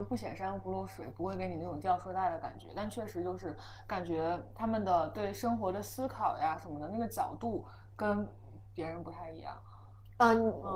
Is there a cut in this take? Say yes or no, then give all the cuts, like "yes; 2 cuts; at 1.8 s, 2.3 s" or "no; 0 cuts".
no; 0 cuts